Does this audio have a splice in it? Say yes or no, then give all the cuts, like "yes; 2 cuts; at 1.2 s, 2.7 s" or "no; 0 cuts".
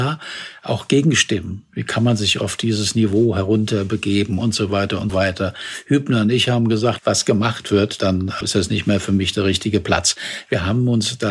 yes; 3 cuts; at 5.1 s, 7.0 s, 8.4 s